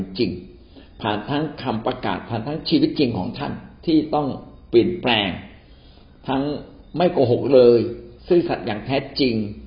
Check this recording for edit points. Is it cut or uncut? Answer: cut